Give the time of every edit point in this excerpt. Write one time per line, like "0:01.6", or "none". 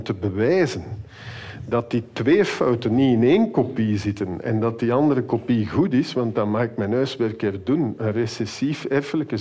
none